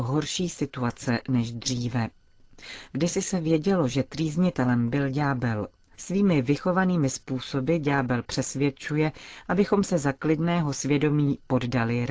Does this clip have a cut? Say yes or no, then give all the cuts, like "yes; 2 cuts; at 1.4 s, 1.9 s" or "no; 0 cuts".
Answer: yes; 1 cut; at 6.0 s